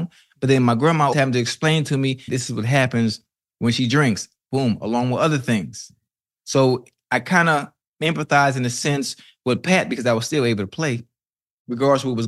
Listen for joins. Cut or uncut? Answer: cut